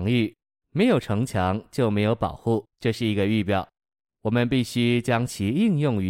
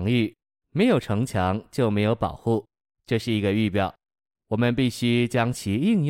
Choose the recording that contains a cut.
first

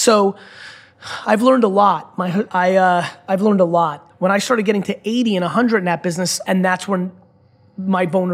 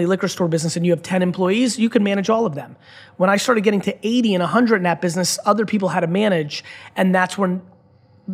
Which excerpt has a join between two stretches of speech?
first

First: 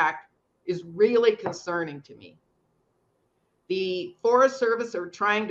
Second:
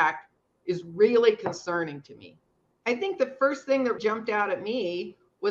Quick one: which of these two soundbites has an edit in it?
second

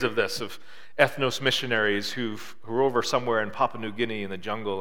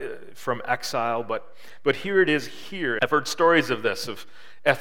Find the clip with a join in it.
second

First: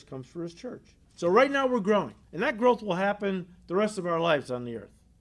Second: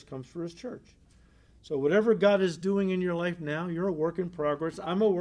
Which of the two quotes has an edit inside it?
first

